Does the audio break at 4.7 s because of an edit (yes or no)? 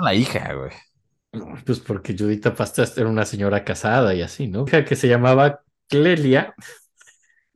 yes